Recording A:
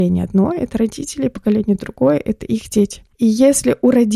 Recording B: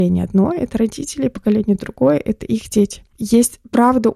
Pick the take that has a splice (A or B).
B